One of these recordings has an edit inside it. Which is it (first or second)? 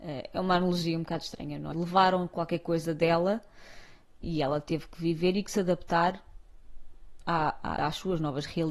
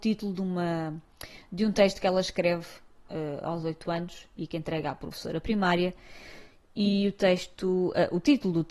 first